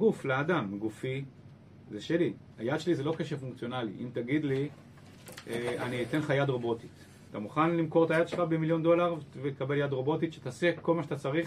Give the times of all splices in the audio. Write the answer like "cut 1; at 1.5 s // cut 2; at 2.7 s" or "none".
cut 1; at 7.3 s